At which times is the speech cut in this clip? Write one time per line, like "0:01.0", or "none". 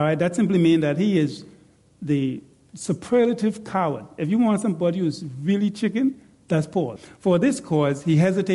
0:07.0